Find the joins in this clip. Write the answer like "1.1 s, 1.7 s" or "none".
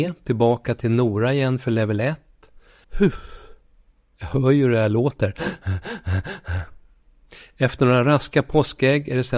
2.8 s